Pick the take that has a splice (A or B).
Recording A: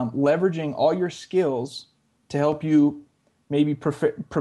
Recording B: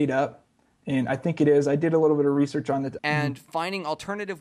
B